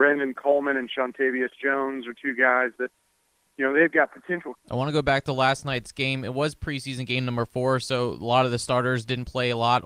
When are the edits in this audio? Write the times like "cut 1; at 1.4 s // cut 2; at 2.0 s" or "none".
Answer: cut 1; at 4.5 s